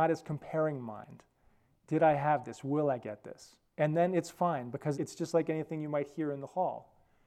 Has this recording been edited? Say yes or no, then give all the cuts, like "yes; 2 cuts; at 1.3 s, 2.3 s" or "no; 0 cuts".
yes; 2 cuts; at 3.7 s, 4.9 s